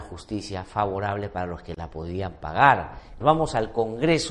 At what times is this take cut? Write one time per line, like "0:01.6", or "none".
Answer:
0:03.2